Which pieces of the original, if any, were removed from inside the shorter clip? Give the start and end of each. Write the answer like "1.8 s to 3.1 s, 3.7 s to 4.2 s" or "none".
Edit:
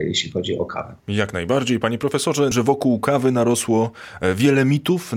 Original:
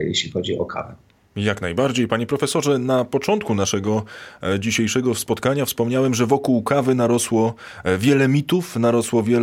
1.0 s to 1.3 s, 2.8 s to 6.1 s